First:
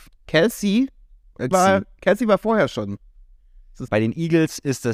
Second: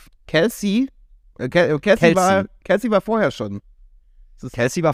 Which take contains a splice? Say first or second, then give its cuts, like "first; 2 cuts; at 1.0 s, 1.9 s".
first; 2 cuts; at 1.5 s, 3.9 s